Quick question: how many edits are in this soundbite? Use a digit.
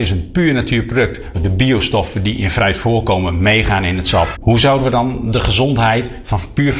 2